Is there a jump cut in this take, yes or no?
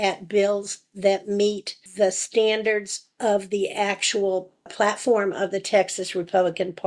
yes